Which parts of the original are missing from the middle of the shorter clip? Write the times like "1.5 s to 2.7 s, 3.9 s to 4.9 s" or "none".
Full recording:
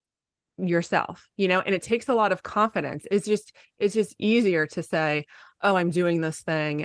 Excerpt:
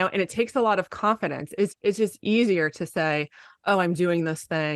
3.2 s to 3.7 s